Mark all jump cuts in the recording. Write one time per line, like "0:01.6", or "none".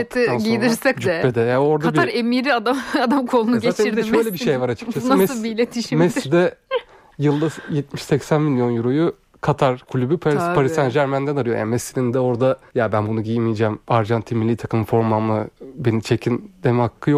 0:00.9
0:12.7